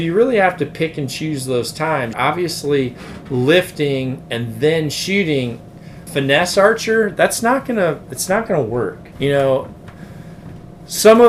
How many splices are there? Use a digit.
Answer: 3